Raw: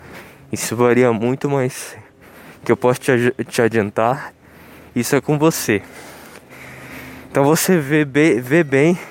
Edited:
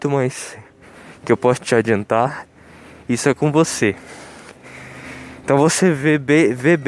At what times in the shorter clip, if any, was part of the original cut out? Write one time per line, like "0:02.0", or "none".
0:01.6

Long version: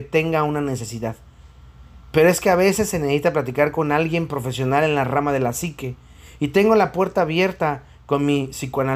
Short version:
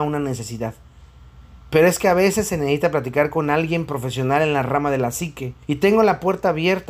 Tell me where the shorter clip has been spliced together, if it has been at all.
0:05.6

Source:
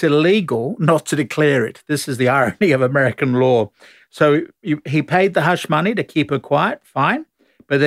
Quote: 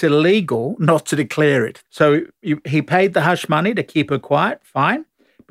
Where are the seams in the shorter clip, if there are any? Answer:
0:01.8

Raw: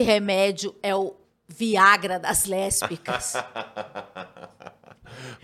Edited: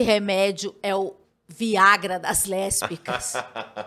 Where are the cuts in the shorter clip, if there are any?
none

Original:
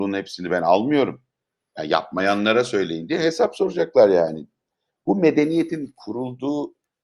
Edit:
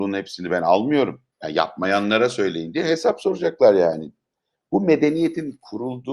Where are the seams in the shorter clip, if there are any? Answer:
0:01.3

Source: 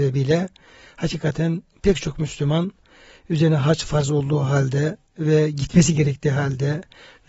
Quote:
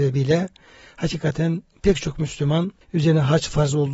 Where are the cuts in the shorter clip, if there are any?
0:02.8

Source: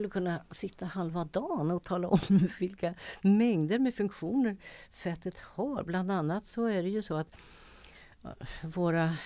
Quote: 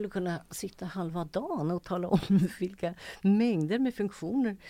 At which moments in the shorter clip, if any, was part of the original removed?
none

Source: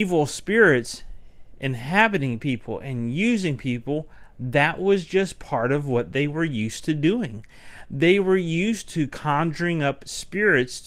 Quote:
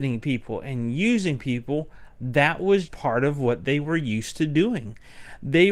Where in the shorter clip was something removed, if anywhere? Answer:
0:02.9

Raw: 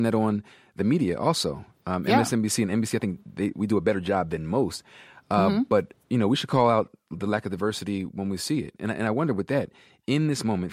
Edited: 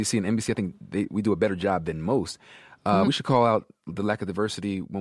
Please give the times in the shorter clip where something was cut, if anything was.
0:03.0

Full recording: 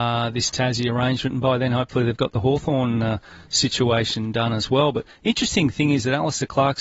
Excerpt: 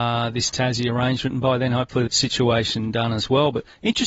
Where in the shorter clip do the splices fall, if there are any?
0:02.1

